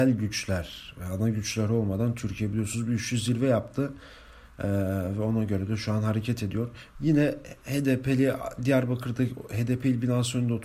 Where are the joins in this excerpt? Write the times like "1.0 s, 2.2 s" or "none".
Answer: 7.0 s

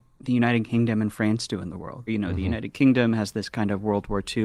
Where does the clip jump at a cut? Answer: 2.1 s

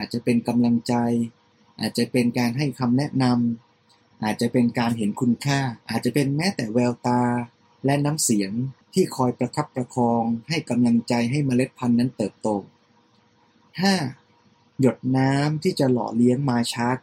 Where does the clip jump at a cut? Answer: 5.8 s, 8.8 s

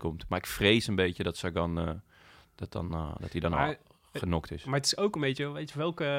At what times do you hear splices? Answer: none

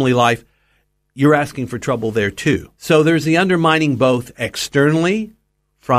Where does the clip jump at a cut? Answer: 2.7 s, 4.3 s

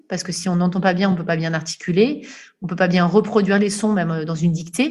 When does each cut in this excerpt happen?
none

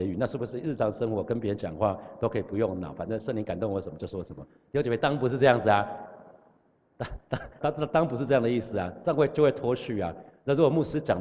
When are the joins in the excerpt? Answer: 7.6 s

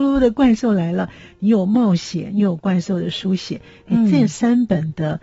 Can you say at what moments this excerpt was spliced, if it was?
none

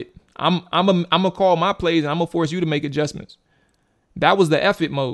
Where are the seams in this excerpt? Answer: none

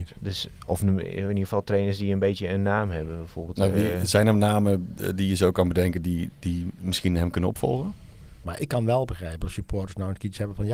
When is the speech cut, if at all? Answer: 8.4 s

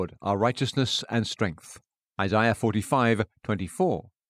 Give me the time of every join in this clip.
none

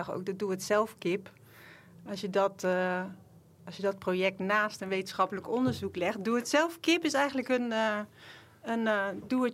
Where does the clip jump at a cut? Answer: none

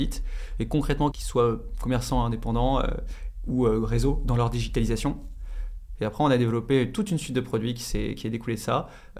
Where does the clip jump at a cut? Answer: 1.1 s, 6.0 s

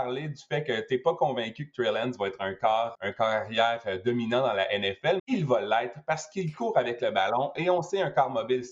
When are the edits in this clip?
2.9 s, 5.2 s

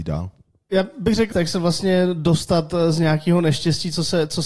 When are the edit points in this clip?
1.3 s

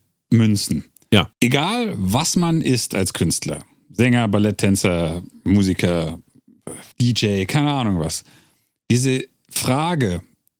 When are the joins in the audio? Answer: 1.3 s, 6.9 s

